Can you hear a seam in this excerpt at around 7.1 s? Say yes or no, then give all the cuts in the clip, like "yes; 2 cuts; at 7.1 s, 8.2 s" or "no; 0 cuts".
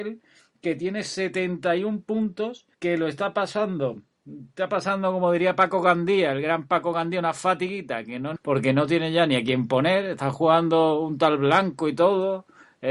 no; 2 cuts; at 2.7 s, 8.4 s